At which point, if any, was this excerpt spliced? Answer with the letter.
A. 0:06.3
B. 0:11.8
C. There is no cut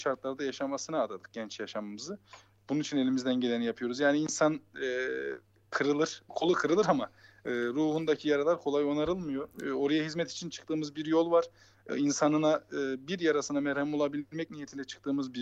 A